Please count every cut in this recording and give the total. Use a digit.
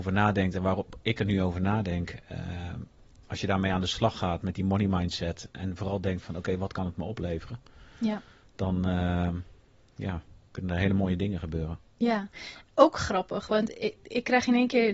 0